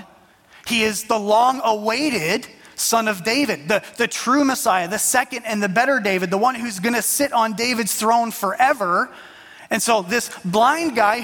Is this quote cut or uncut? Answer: uncut